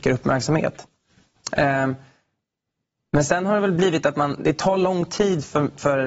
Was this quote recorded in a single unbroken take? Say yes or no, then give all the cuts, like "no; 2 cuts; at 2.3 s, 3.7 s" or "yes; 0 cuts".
yes; 0 cuts